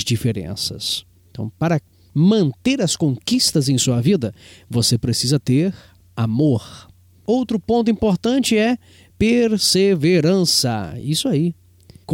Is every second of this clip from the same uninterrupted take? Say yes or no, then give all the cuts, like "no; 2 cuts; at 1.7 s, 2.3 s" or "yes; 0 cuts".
yes; 0 cuts